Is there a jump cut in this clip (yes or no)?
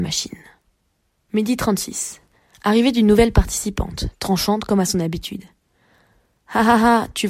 yes